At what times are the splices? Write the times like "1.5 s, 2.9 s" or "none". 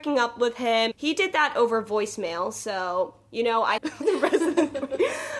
0.9 s, 3.8 s